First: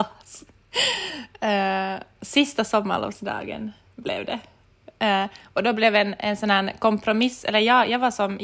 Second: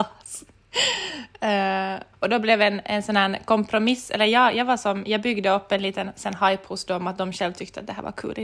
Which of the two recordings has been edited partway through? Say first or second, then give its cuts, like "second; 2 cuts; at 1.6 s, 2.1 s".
second; 1 cut; at 2.1 s